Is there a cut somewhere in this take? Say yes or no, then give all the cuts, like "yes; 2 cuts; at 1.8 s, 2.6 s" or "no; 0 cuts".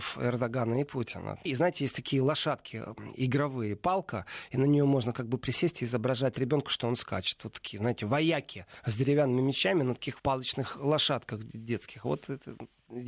yes; 2 cuts; at 1.5 s, 10.2 s